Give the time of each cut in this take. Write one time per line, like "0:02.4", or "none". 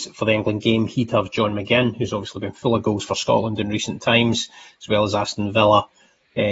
none